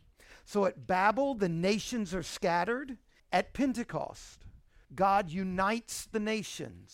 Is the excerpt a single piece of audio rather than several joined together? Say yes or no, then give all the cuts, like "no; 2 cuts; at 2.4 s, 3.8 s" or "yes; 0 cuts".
no; 2 cuts; at 3.2 s, 4.8 s